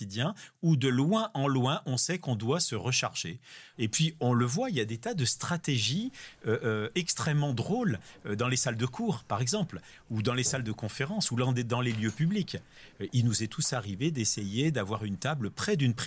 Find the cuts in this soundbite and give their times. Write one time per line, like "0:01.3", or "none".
0:03.7